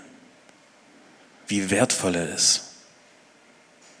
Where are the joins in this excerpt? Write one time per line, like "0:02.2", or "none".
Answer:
0:01.5